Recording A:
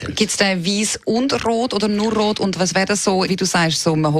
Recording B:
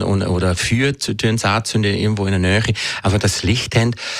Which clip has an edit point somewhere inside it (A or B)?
A